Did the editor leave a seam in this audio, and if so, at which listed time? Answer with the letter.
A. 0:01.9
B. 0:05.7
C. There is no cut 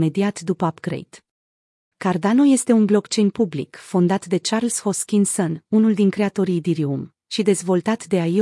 A